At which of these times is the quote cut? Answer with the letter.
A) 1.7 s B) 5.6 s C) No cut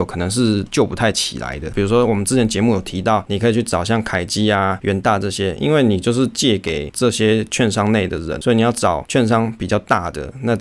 A